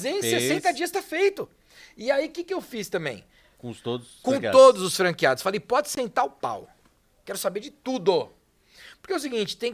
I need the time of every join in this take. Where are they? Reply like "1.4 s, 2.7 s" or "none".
3.5 s